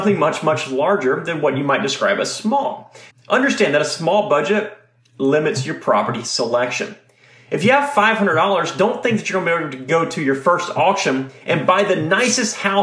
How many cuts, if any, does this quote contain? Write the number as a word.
one